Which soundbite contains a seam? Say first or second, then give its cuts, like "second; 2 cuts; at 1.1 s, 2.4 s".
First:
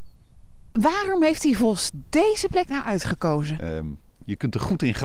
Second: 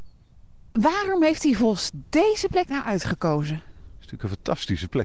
first; 1 cut; at 3.6 s